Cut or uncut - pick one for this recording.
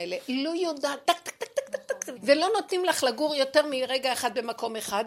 cut